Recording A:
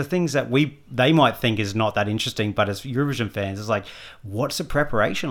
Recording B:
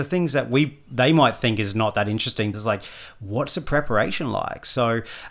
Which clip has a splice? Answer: B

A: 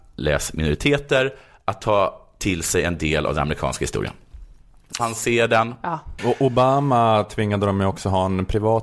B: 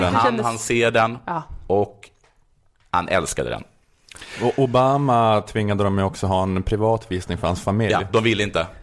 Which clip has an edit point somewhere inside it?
A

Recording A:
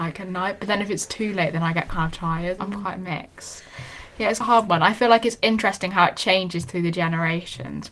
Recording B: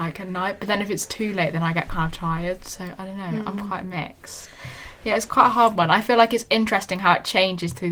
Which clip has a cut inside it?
A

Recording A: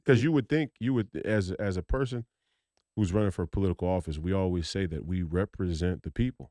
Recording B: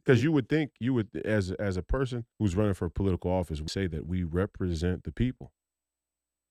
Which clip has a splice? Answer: B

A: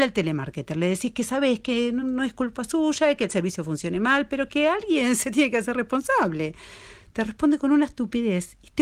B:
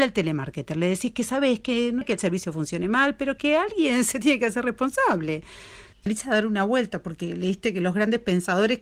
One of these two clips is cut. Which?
B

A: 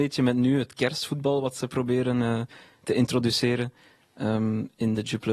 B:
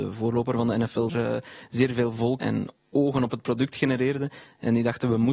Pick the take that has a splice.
B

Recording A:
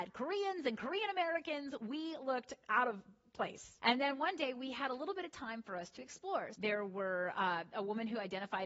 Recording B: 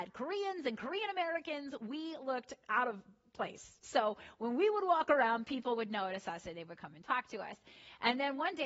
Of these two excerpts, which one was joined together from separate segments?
A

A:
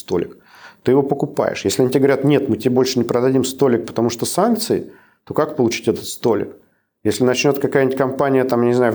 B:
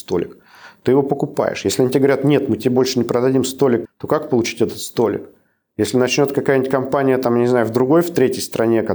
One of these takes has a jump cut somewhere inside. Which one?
B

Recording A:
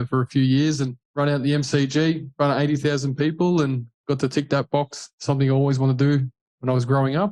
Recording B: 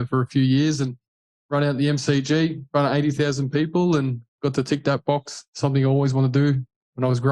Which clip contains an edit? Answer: A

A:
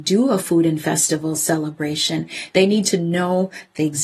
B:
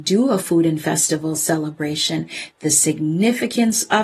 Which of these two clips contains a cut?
B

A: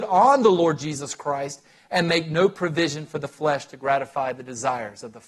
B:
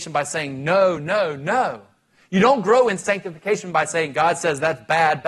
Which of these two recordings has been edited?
B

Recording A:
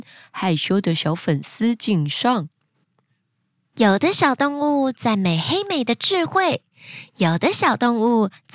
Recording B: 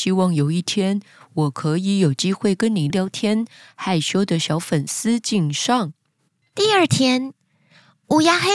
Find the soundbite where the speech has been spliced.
B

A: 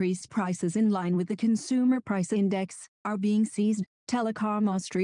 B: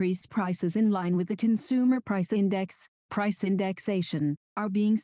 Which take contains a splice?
A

